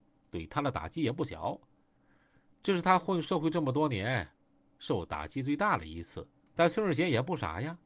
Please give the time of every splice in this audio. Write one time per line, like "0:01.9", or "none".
0:06.5